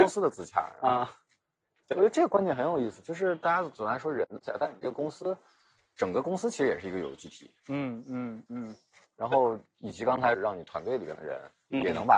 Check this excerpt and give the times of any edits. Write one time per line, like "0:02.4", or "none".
0:08.5
0:10.3